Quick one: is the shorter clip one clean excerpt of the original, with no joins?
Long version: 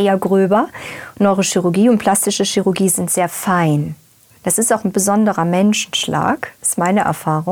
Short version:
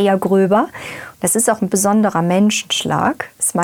no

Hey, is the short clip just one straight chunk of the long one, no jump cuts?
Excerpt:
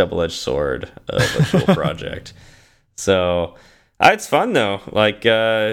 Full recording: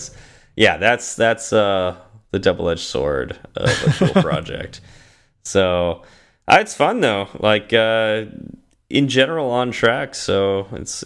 yes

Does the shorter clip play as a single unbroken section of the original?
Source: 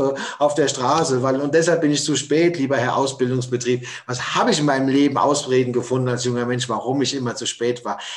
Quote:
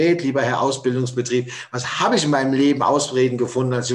yes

